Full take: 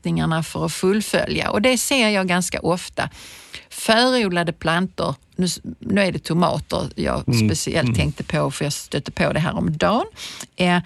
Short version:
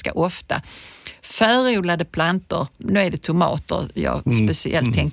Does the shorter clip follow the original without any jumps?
no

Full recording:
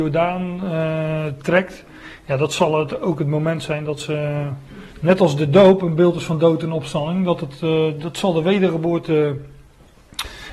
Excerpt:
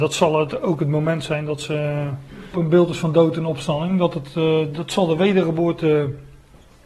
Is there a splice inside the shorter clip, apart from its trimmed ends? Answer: yes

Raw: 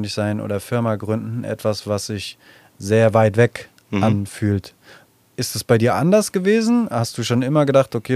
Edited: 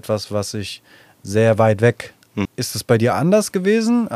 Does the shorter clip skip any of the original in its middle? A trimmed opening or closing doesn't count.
yes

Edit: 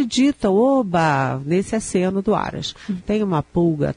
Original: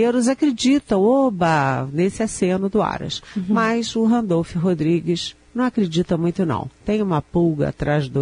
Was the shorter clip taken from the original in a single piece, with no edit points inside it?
no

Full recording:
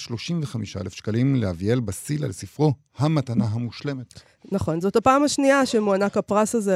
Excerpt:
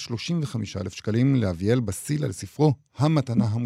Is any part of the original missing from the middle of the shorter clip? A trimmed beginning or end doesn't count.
no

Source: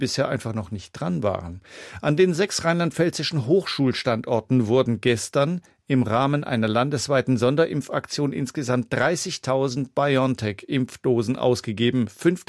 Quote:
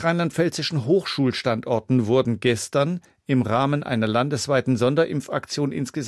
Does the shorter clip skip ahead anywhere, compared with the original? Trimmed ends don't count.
no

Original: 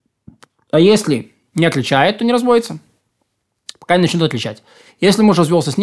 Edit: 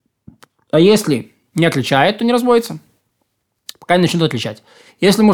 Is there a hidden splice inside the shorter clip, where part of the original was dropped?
no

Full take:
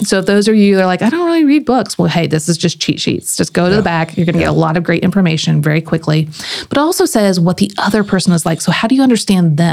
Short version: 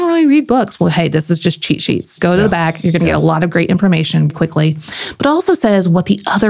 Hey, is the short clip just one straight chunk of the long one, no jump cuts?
no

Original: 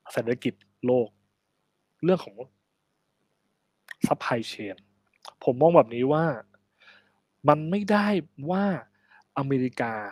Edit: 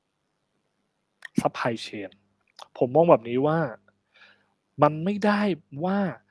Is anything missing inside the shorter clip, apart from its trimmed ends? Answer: no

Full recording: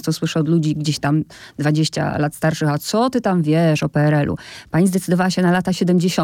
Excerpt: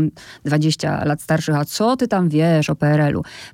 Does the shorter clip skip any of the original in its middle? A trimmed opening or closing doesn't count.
no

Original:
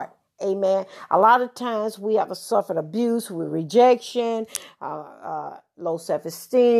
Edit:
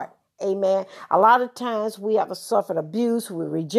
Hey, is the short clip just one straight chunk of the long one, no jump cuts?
yes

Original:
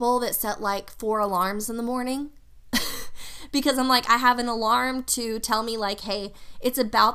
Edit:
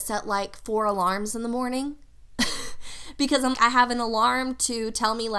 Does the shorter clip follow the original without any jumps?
no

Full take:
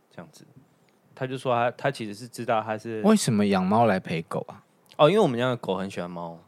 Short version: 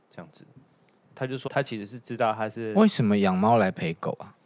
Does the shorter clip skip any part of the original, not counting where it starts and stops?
yes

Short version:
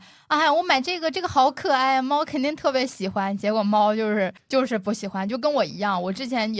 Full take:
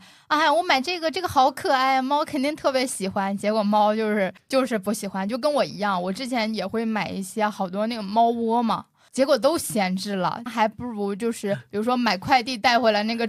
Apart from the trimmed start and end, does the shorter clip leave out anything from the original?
no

